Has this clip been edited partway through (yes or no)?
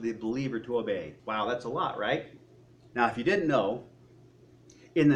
yes